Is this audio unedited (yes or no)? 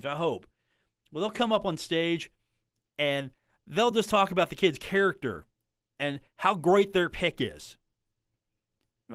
yes